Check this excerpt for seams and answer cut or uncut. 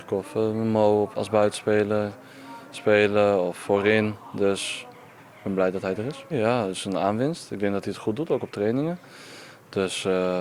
cut